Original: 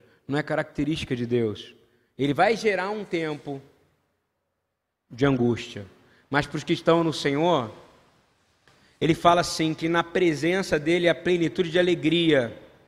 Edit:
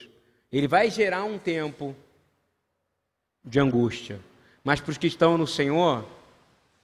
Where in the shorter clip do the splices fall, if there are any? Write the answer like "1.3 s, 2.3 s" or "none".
none